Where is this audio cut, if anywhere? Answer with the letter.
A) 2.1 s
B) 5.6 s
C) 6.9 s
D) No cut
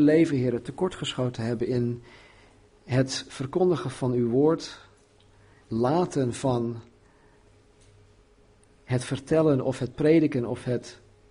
B